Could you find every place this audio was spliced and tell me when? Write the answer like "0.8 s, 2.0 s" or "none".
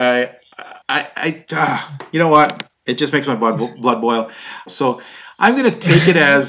4.7 s